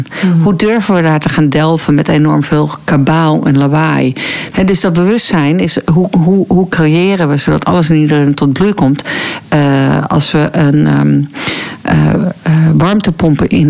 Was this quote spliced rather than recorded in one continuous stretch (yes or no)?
yes